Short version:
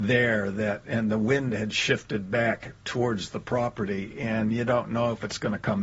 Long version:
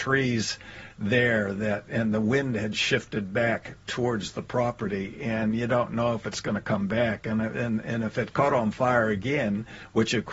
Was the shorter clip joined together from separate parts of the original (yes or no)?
no